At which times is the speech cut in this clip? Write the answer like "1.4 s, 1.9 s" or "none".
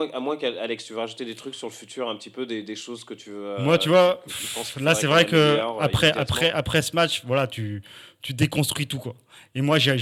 none